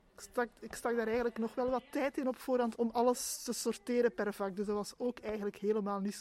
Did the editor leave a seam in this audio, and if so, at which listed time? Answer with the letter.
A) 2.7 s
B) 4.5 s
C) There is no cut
A